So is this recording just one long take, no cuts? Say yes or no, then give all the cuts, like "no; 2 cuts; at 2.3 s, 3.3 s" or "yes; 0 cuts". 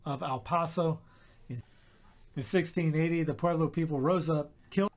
yes; 0 cuts